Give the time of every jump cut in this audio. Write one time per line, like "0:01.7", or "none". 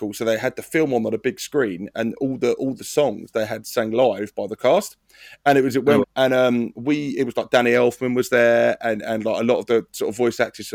0:06.0